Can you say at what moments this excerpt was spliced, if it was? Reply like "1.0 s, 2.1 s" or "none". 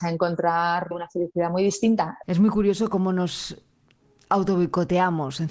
0.9 s, 2.2 s